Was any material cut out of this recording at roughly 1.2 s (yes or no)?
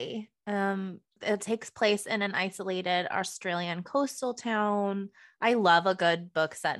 yes